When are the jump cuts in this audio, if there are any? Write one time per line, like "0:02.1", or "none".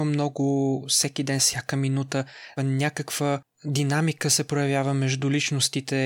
0:01.4
0:02.6

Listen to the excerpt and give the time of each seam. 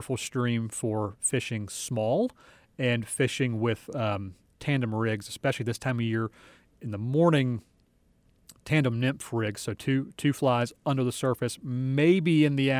none

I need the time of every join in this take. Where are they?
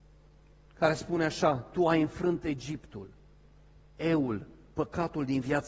none

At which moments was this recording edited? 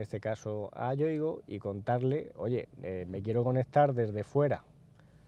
0:02.3

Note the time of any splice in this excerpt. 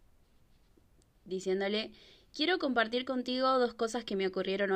none

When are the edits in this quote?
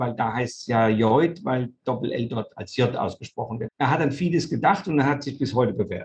0:03.7

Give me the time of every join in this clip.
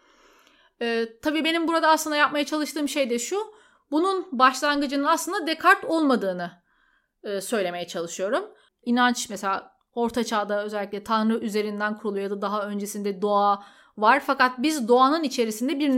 0:08.7

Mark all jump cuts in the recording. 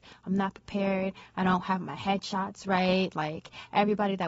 none

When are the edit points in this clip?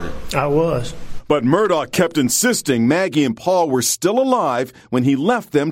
none

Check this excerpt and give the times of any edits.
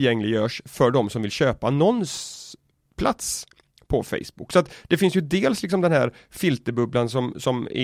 none

